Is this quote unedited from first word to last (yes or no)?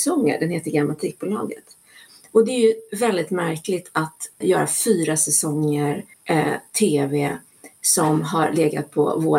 no